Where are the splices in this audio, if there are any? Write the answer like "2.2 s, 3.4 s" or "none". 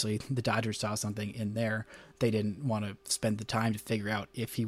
none